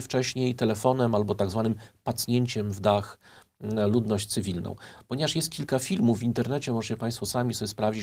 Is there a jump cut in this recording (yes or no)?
no